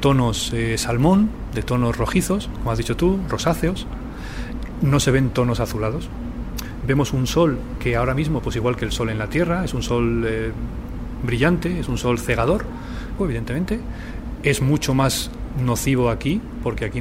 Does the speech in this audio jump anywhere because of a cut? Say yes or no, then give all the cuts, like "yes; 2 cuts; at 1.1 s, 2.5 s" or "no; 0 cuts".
yes; 1 cut; at 13.2 s